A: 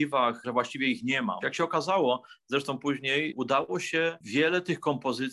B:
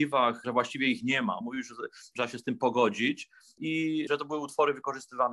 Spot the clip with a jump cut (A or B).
A